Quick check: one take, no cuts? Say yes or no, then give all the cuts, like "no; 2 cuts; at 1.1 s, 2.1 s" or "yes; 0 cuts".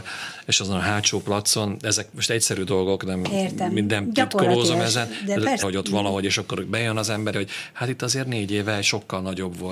no; 2 cuts; at 5.6 s, 7.3 s